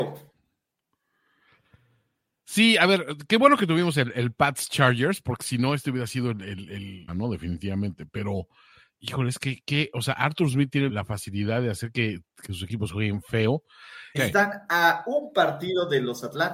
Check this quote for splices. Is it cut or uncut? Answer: cut